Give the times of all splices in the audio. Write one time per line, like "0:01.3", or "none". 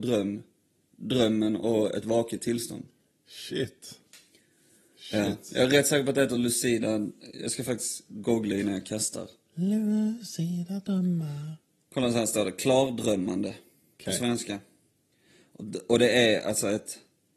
none